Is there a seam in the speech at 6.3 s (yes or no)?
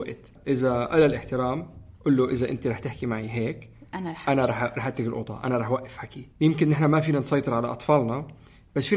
yes